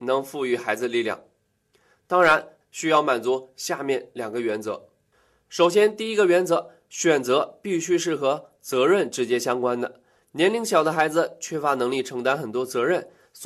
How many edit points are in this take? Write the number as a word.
one